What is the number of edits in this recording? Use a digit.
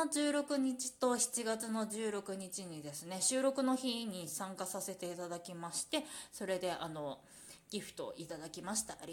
0